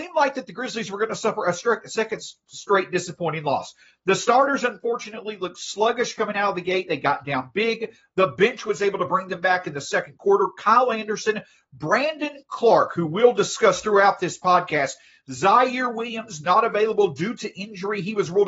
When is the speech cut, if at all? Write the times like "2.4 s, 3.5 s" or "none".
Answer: none